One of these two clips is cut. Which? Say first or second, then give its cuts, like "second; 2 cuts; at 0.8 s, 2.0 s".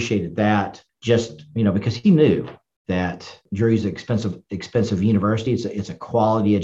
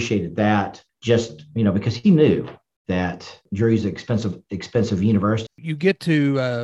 second; 1 cut; at 5.5 s